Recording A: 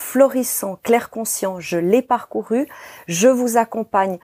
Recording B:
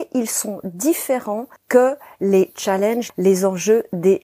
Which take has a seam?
B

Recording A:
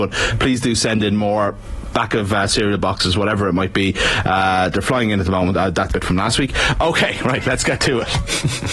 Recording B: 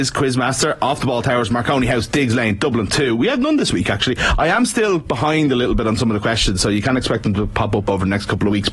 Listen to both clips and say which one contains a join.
A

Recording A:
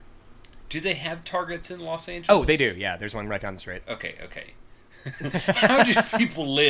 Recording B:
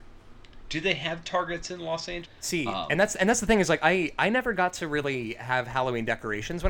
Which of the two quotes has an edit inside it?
B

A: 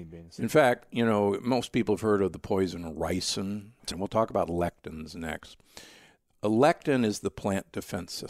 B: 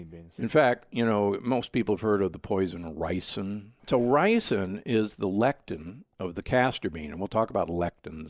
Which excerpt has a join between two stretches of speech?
A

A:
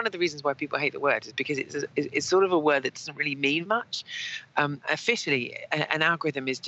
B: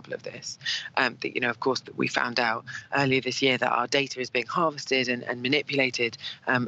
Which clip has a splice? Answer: A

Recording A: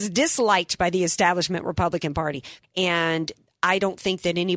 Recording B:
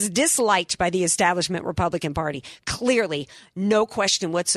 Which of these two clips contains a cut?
A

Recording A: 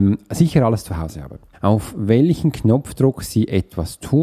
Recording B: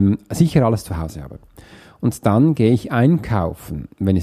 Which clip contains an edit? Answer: A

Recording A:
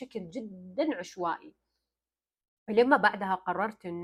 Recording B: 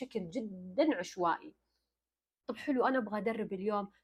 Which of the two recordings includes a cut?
B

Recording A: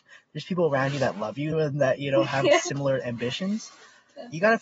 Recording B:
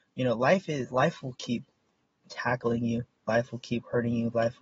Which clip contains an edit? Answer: A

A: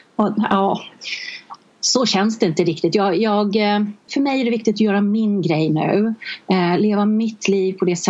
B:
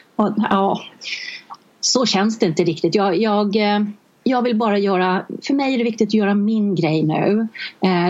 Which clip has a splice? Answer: A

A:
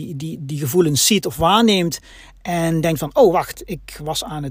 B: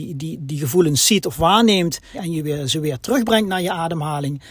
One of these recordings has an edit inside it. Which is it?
B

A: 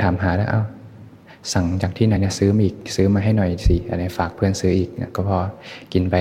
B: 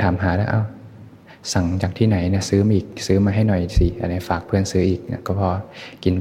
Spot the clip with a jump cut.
A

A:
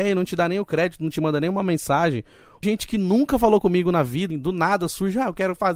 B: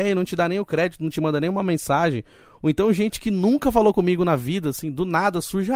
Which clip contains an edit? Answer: A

